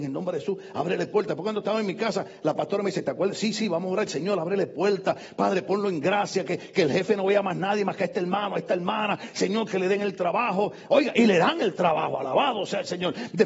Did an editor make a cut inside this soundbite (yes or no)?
no